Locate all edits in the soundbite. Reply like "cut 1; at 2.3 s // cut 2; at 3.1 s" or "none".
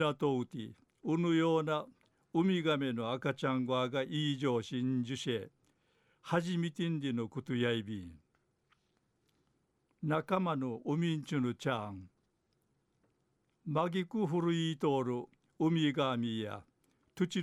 none